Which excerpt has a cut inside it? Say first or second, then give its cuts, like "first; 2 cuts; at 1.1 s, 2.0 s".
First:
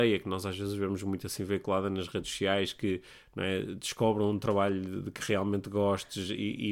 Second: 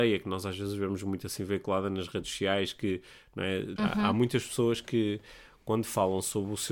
second; 1 cut; at 3.8 s